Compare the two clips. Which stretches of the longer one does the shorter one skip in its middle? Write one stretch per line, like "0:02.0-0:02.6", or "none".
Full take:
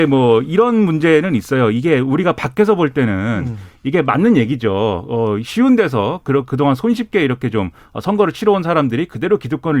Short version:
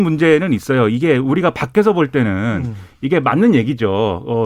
none